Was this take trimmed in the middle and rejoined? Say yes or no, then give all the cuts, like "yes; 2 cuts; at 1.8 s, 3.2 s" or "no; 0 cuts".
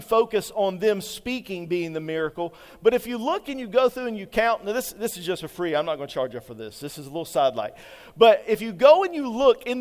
no; 0 cuts